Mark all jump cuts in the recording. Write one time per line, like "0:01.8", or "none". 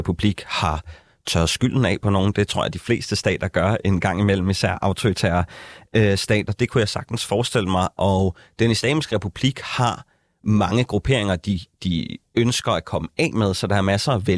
0:03.8